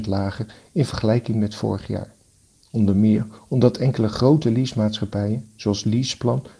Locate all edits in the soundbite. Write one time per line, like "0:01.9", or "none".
0:02.6